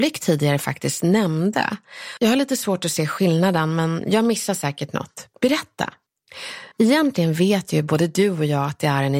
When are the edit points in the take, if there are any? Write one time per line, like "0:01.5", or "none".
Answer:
0:02.2
0:06.7